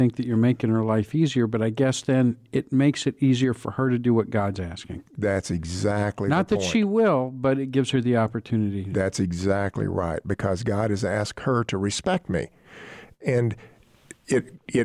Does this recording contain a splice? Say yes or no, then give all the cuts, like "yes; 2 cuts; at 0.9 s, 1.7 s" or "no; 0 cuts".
no; 0 cuts